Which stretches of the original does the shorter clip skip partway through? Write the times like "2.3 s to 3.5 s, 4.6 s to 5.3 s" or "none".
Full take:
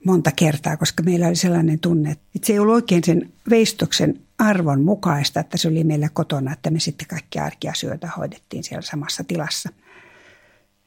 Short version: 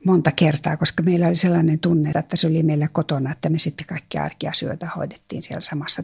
2.1 s to 5.3 s